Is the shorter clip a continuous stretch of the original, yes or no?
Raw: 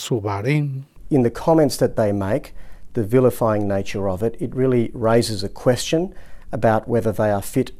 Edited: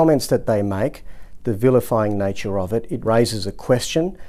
no